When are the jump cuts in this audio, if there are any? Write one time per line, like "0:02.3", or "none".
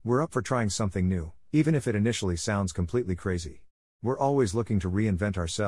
0:03.9